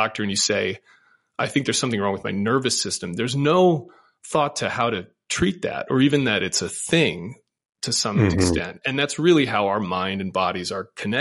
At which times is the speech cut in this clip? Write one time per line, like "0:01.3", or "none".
none